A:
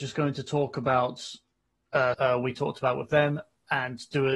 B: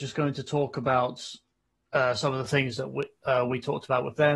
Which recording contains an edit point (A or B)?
A